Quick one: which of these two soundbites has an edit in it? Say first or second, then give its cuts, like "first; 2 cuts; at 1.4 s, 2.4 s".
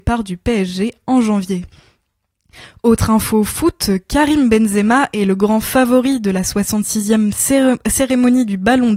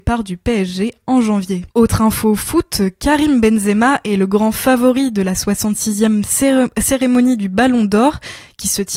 second; 1 cut; at 1.7 s